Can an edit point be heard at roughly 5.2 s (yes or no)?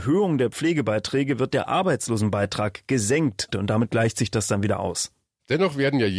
no